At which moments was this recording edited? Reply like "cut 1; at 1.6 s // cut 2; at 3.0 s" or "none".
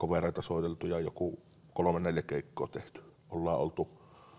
cut 1; at 3.2 s